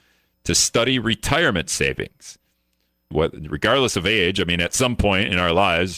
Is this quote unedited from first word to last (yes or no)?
no